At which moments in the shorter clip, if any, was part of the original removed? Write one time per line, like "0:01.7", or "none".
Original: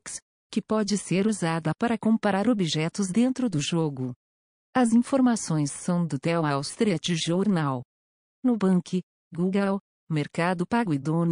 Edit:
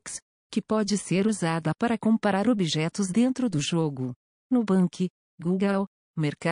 0:04.3